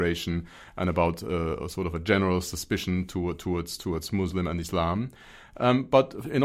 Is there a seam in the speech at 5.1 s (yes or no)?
no